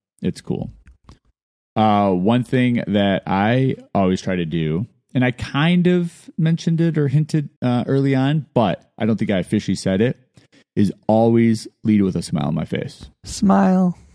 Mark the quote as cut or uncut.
cut